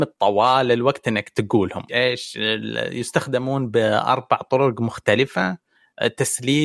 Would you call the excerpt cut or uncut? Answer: cut